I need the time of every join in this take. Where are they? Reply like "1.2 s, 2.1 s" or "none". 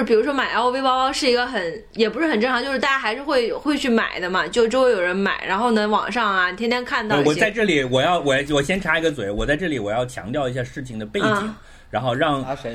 none

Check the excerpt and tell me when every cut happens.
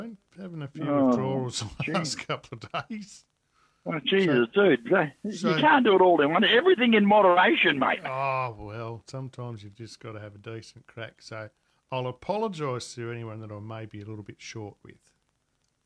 none

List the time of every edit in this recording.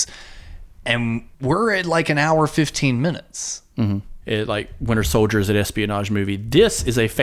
1.3 s, 4.2 s

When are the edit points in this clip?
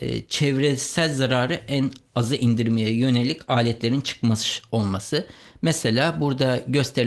none

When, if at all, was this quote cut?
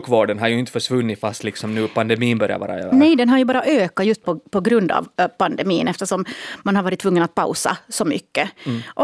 none

